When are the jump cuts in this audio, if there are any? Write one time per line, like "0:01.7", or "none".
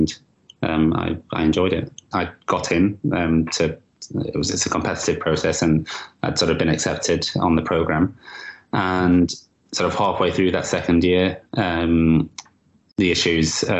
0:02.1